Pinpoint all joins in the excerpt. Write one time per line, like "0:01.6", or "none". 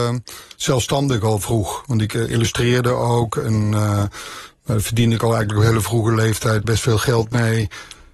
0:06.6